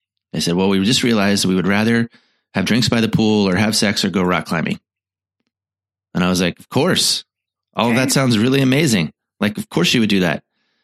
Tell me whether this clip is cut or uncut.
uncut